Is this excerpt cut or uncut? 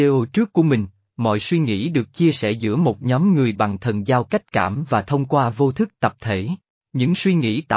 uncut